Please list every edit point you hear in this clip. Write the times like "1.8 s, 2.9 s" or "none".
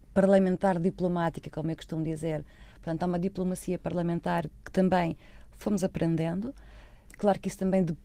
none

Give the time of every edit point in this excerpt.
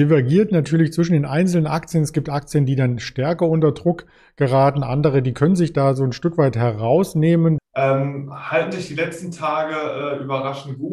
7.6 s

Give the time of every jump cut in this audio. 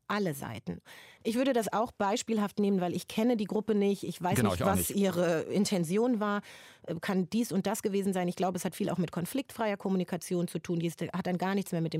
1.2 s

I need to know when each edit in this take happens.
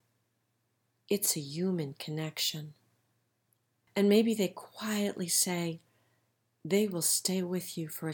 none

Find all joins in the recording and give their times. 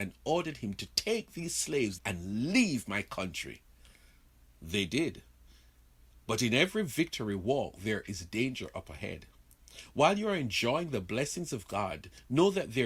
2.0 s

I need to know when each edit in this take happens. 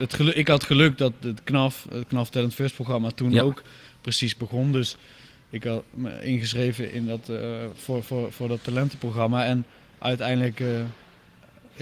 none

